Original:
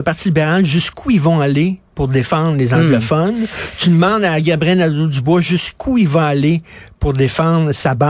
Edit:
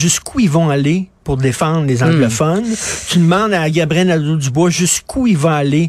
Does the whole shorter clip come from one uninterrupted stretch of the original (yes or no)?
yes